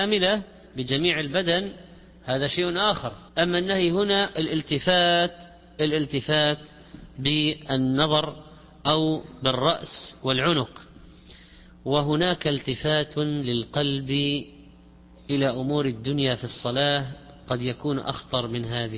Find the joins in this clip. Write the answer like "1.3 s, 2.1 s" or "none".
3.3 s